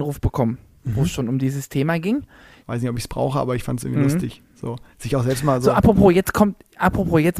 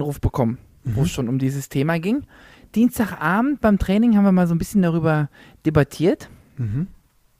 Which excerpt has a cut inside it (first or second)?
first